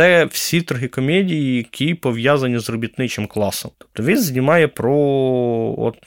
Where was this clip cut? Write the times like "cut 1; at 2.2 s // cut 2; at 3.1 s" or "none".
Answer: cut 1; at 3.7 s